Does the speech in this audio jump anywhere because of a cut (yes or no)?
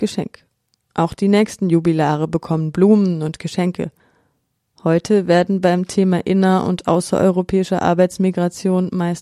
no